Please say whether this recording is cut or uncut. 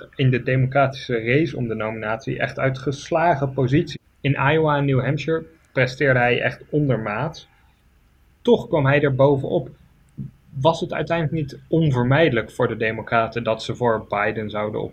uncut